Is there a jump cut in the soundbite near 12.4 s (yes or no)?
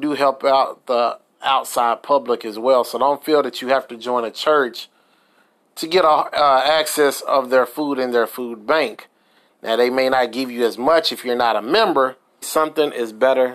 yes